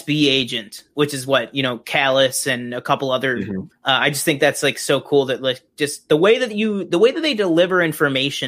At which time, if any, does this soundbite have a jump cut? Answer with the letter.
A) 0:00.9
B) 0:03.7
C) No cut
B